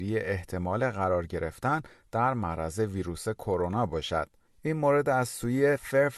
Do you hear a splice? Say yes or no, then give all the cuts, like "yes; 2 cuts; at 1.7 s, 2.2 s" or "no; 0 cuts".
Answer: yes; 1 cut; at 4.4 s